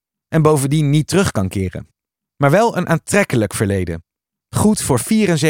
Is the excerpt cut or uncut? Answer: uncut